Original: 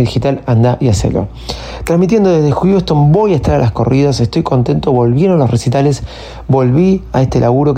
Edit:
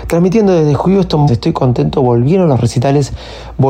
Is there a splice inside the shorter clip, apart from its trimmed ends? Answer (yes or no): yes